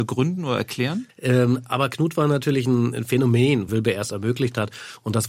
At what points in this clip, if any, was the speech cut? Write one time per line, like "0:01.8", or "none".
0:01.1
0:03.7